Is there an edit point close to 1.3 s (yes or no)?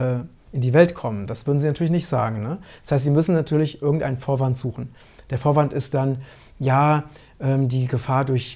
no